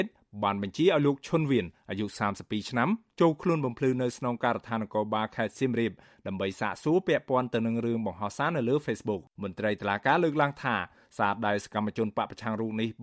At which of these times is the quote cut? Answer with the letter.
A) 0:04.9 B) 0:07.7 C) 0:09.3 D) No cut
C